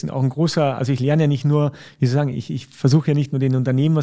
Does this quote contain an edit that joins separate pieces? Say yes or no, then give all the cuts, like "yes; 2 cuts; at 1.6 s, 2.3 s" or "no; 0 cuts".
no; 0 cuts